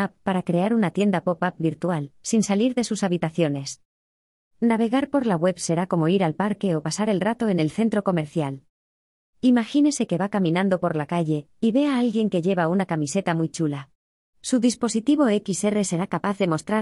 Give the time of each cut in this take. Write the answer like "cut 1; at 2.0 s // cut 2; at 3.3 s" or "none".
cut 1; at 2.2 s // cut 2; at 4.4 s